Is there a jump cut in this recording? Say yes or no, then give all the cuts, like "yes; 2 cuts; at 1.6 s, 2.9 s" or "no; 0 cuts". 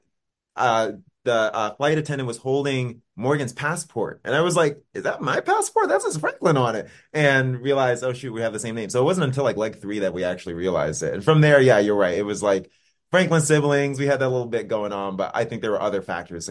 no; 0 cuts